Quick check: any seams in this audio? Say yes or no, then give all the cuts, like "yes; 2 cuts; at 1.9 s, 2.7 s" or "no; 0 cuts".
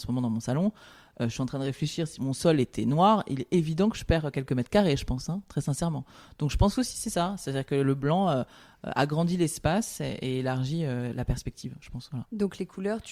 no; 0 cuts